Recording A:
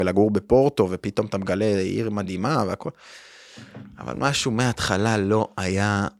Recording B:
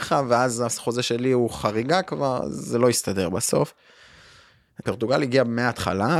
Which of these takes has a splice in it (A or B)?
B